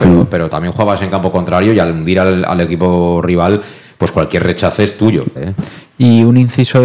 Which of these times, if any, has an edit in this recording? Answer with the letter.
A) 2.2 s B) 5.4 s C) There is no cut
B